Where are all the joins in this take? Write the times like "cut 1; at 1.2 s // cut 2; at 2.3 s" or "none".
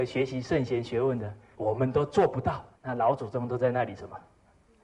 cut 1; at 1.5 s // cut 2; at 2.7 s